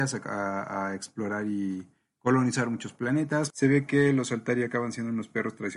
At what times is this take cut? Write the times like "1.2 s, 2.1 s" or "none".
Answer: 3.5 s